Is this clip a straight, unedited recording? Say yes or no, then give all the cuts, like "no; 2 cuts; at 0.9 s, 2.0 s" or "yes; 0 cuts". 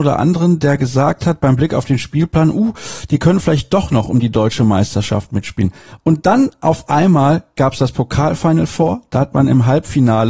yes; 0 cuts